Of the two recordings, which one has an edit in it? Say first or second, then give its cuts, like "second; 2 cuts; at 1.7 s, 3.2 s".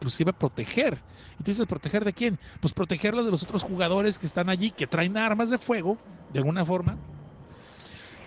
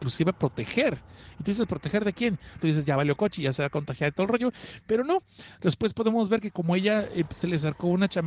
second; 1 cut; at 2.6 s